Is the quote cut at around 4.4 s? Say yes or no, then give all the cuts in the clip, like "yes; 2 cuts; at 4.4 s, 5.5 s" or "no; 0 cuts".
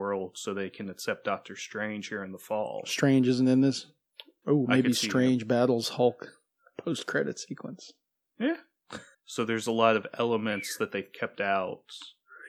yes; 2 cuts; at 4.4 s, 9.1 s